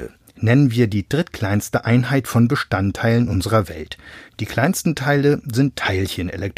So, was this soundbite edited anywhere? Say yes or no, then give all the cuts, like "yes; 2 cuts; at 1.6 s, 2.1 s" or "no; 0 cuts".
no; 0 cuts